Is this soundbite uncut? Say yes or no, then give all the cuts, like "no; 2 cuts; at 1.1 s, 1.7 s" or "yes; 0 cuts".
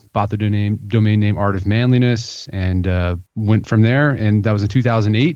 no; 1 cut; at 3.3 s